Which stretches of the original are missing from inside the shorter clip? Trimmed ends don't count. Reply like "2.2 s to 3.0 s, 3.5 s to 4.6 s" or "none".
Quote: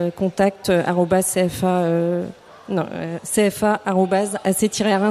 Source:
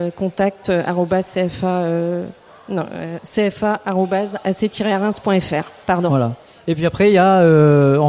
none